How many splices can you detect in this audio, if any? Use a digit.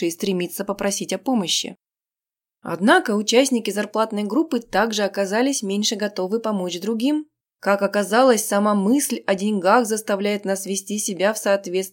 1